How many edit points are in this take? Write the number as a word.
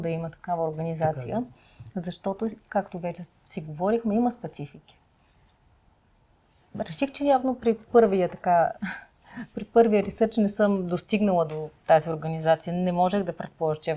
zero